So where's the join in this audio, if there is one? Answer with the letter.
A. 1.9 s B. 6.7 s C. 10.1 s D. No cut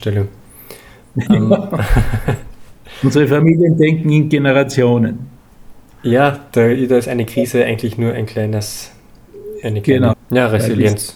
C